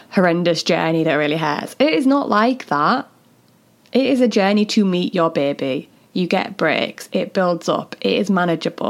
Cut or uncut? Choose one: uncut